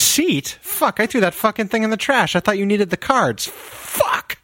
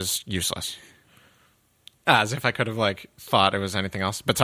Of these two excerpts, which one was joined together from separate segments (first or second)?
second